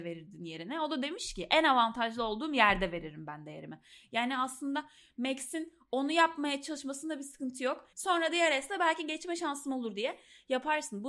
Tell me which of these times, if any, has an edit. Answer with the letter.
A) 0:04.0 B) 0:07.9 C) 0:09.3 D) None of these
B